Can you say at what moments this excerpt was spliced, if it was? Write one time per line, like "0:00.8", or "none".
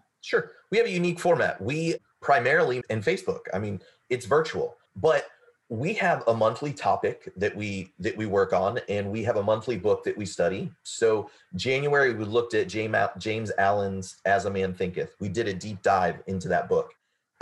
0:02.8